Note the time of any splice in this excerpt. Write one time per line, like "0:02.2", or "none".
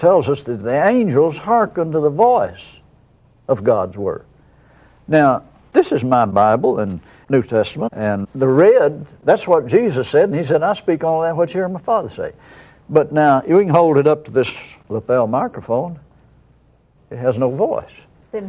none